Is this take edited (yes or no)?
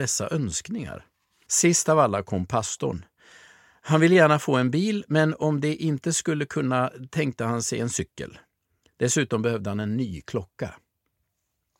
yes